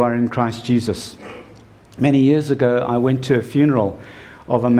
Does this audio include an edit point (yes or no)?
no